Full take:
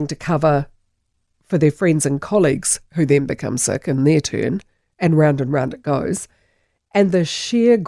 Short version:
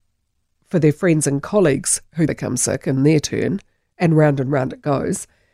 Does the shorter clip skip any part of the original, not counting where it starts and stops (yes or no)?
yes